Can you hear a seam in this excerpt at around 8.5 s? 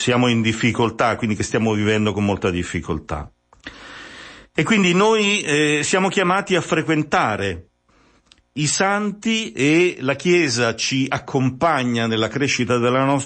no; 0 cuts

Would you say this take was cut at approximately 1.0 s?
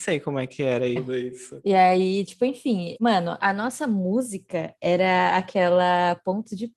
yes; 2 cuts; at 1.0 s, 3.4 s

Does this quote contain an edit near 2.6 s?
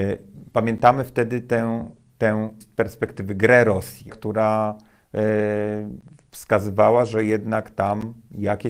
yes; 2 cuts; at 2.6 s, 4.1 s

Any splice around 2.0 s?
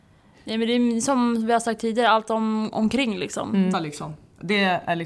no; 1 cut; at 3.7 s

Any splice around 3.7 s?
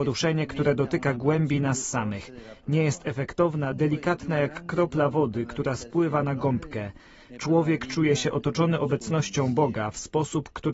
yes; 1 cut; at 3.7 s

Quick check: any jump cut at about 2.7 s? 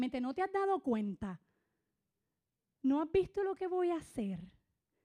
yes; 1 cut; at 2.7 s

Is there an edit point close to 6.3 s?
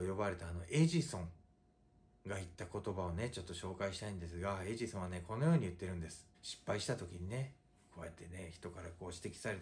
yes; 1 cut; at 6.3 s

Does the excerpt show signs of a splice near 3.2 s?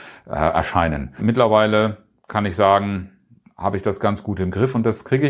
no; 1 cut; at 1.2 s

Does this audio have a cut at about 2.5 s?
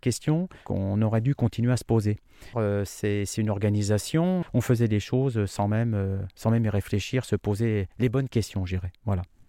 yes; 2 cuts; at 2.5 s, 4.4 s

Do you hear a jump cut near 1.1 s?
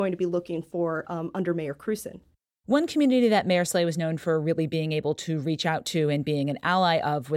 no; 0 cuts

